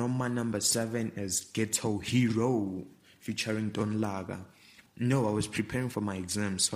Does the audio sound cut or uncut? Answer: cut